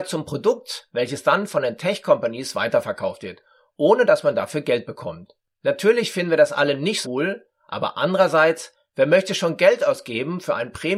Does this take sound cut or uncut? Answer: cut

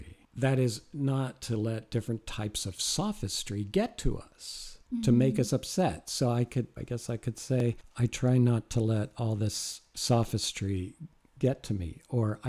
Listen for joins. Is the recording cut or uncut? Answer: cut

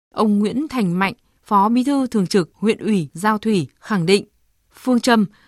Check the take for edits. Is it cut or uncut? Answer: uncut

